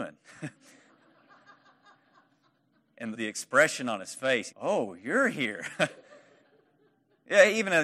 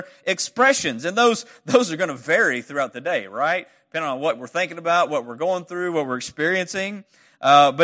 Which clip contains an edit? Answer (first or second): first